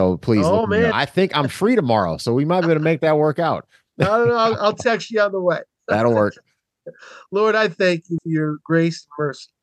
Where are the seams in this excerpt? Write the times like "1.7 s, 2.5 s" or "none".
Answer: 8.2 s